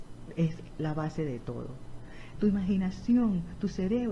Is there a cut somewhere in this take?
yes; 1 cut; at 2.3 s

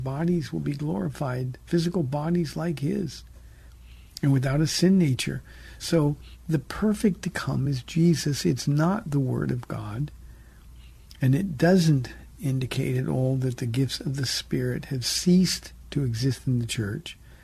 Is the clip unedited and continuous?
yes; 0 cuts

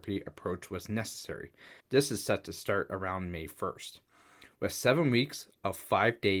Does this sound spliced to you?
yes; 1 cut; at 1.8 s

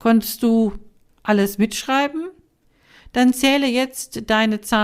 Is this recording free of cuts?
yes; 0 cuts

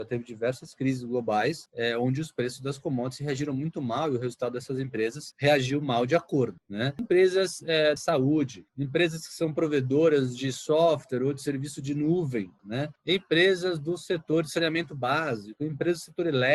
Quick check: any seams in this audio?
yes; 2 cuts; at 8.0 s, 12.6 s

